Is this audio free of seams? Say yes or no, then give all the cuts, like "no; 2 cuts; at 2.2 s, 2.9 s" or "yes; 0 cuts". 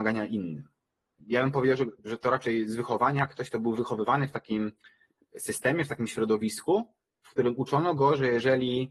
no; 1 cut; at 1.1 s